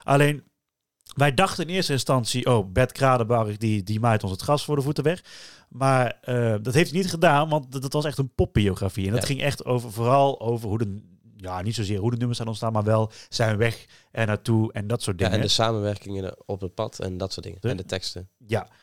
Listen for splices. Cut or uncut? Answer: cut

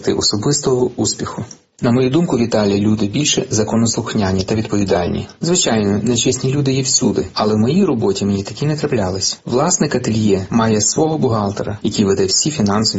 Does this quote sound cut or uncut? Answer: uncut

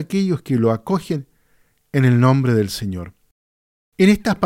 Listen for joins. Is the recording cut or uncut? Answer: uncut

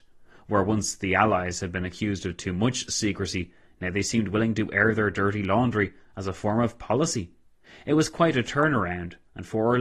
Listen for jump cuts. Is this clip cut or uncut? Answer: uncut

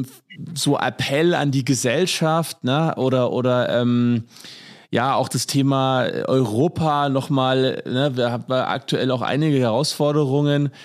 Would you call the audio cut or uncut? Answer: uncut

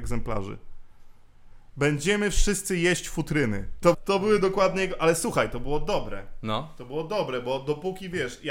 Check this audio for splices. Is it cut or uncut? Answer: cut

